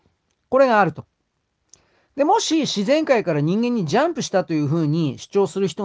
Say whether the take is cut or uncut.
uncut